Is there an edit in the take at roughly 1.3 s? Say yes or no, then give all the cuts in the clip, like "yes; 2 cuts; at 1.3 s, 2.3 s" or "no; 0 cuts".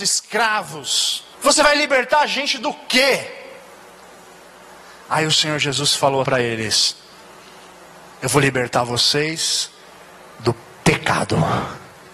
yes; 2 cuts; at 1.3 s, 6.2 s